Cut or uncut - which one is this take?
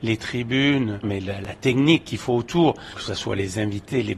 cut